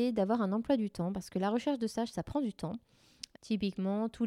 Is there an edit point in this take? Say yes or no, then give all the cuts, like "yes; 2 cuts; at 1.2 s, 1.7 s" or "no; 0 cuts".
yes; 1 cut; at 3.4 s